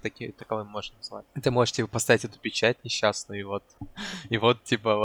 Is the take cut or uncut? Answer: uncut